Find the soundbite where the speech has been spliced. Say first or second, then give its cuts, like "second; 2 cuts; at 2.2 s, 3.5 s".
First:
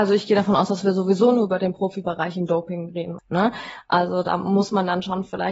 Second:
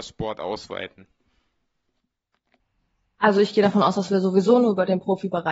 first; 1 cut; at 3.2 s